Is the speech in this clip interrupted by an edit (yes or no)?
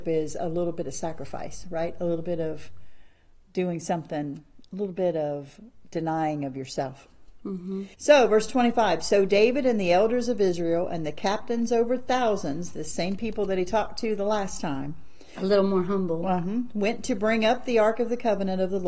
yes